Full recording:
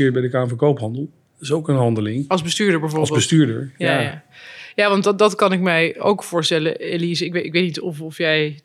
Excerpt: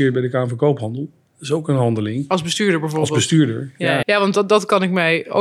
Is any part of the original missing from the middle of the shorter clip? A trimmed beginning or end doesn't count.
yes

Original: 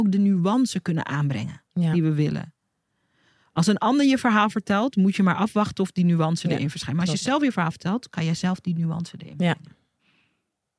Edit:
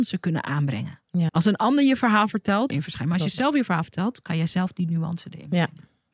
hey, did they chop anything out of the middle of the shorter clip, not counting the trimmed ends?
yes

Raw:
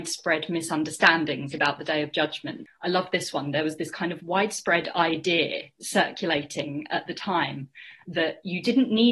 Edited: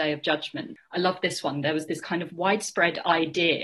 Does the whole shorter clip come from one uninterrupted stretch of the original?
yes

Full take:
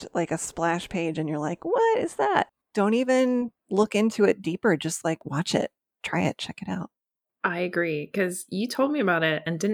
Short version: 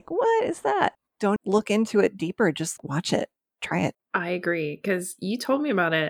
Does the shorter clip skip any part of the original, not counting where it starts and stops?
yes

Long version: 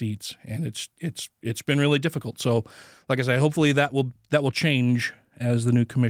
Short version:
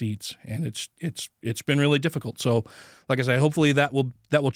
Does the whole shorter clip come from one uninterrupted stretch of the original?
yes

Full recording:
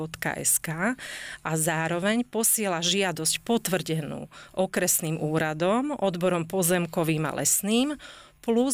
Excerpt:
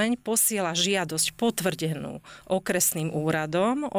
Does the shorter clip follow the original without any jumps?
yes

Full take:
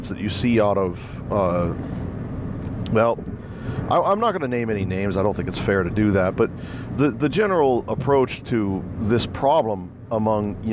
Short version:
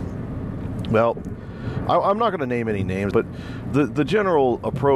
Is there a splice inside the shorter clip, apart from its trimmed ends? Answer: yes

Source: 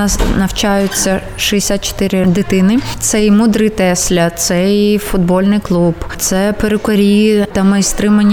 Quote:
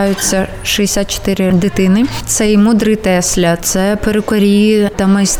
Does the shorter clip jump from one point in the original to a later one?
yes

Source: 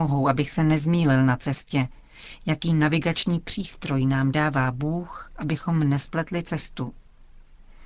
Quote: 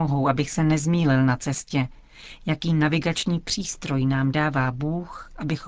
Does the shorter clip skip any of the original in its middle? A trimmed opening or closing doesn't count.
no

